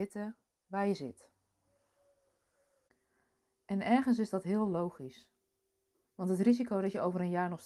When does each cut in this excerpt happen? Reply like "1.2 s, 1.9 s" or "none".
6.0 s